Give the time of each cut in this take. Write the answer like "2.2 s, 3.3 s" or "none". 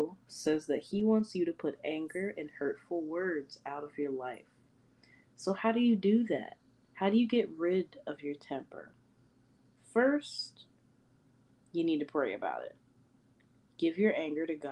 none

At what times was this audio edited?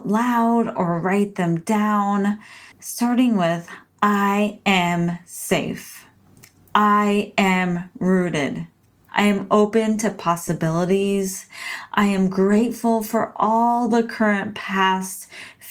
2.7 s, 9.1 s

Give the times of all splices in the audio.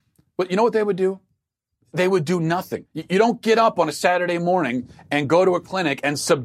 2.9 s

